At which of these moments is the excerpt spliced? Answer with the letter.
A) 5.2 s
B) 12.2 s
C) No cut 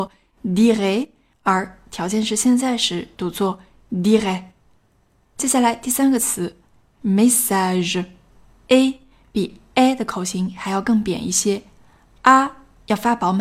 C